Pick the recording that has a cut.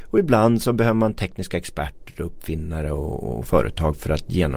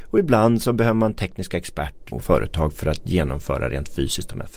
second; 1 cut; at 2.1 s

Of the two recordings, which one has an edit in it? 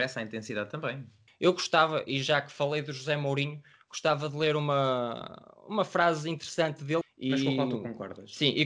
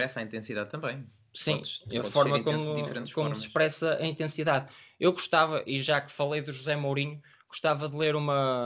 first; 2 cuts; at 1.3 s, 7.0 s

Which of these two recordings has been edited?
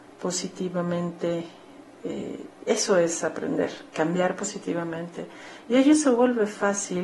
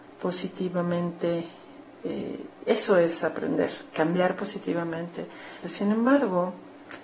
second; 1 cut; at 5.6 s

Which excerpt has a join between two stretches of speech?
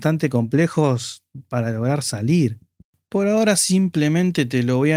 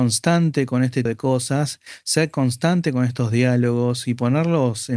second; 1 cut; at 1.1 s

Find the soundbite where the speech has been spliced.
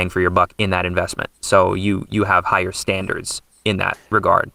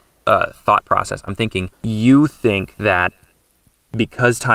second; 1 cut; at 1.7 s

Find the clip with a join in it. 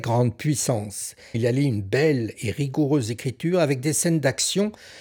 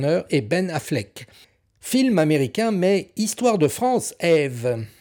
first; 1 cut; at 1.3 s

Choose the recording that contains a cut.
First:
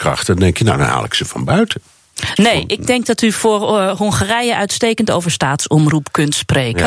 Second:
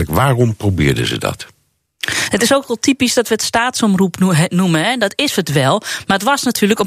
first; 1 cut; at 2.4 s

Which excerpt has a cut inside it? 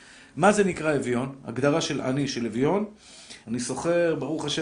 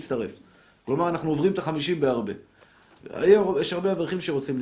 first; 1 cut; at 3.4 s

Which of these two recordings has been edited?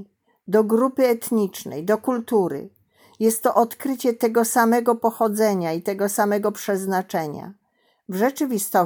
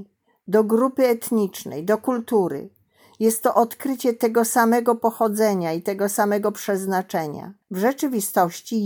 second; 1 cut; at 7.6 s

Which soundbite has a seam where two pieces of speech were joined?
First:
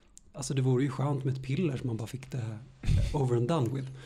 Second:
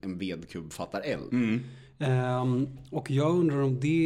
second; 1 cut; at 1.3 s

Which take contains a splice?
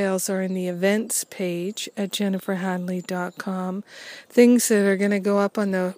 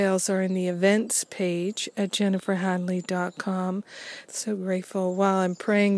second; 1 cut; at 4.2 s

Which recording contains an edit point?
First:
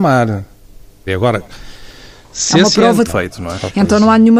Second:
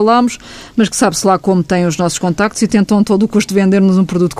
first; 2 cuts; at 1.1 s, 3.1 s

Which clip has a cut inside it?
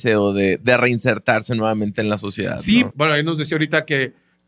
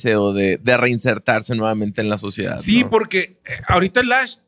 first; 1 cut; at 2.9 s

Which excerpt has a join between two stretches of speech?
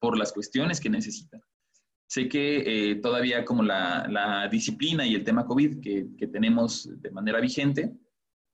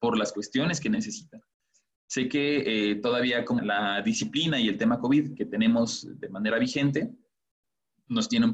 second; 2 cuts; at 3.6 s, 5.4 s

